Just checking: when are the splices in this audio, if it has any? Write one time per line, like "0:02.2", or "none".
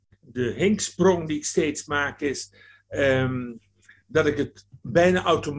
none